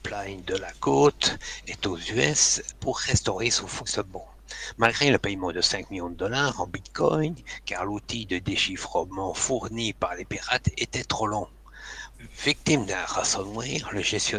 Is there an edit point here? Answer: yes; 2 cuts; at 2.7 s, 12.1 s

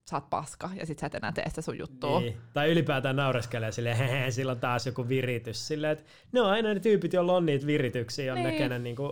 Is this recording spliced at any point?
no; 0 cuts

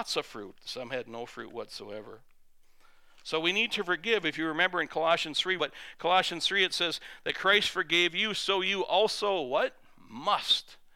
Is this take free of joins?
no; 1 cut; at 5.6 s

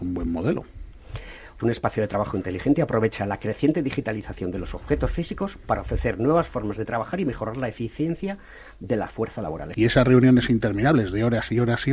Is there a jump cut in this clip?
yes; 2 cuts; at 1.6 s, 9.7 s

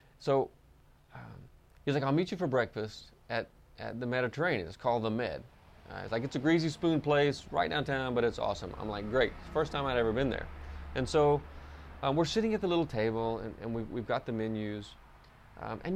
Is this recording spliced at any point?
no; 0 cuts

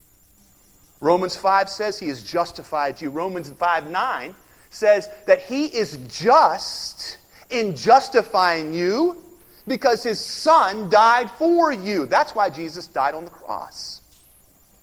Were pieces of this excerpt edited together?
no; 0 cuts

